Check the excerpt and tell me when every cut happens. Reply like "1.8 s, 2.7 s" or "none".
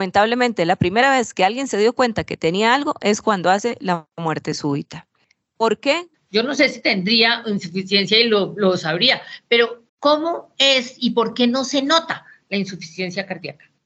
6.1 s, 9.9 s